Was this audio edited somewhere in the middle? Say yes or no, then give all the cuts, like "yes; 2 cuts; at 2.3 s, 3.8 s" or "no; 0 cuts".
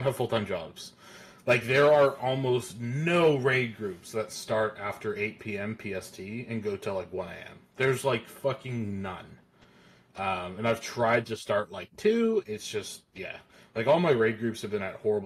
no; 0 cuts